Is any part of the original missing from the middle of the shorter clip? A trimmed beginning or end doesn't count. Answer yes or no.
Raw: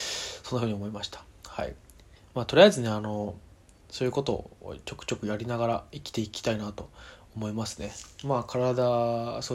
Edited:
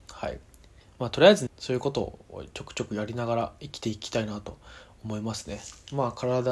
yes